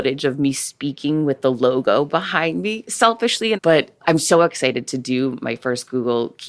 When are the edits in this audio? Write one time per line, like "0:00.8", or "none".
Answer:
0:03.6